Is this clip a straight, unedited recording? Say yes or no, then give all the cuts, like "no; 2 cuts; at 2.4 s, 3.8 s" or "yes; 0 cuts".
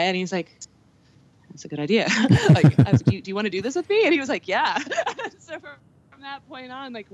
yes; 0 cuts